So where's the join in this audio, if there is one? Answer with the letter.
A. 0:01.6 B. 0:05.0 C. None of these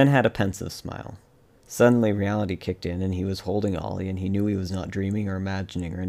A